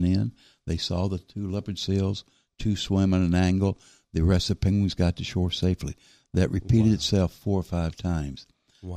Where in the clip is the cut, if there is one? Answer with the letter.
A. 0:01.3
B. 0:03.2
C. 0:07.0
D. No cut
D